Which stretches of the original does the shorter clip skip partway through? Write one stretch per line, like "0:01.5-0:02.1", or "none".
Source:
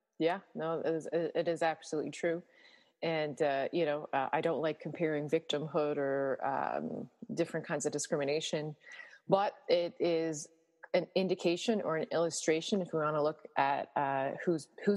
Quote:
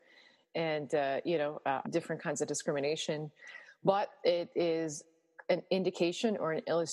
0:04.3-0:07.3